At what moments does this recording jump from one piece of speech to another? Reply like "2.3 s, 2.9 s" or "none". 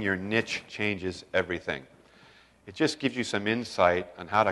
none